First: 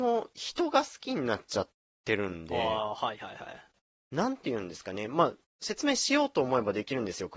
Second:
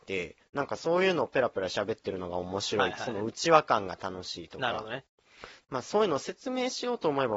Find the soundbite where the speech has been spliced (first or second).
second